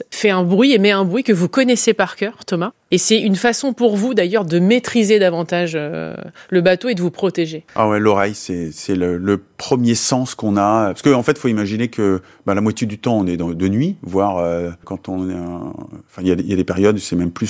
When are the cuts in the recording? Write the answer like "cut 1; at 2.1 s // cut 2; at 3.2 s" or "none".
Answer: none